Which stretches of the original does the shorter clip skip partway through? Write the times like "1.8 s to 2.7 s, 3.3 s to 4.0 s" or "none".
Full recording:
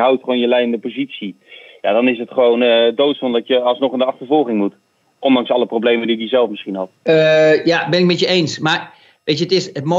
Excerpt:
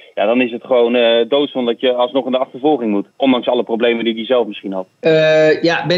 4.8 s to 5.1 s